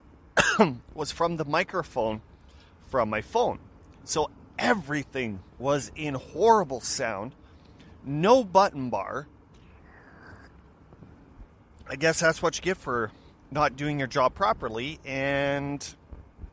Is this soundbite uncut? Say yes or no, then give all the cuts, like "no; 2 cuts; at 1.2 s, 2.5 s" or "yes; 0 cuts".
yes; 0 cuts